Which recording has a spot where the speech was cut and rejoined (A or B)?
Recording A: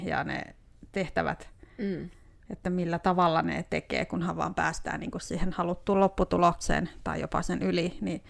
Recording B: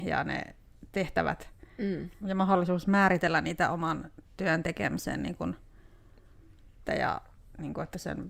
B